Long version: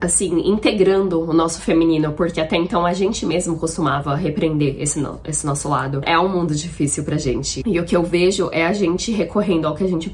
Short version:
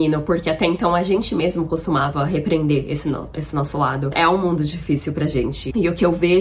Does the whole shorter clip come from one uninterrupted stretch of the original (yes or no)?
yes